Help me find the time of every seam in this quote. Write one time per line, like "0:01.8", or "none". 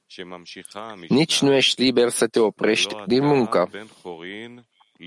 none